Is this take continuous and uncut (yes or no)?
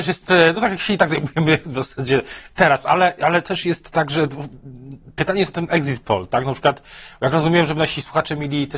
yes